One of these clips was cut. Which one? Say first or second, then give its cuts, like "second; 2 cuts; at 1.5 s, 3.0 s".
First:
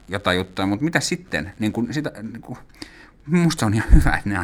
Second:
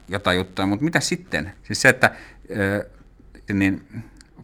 second; 2 cuts; at 1.5 s, 3.5 s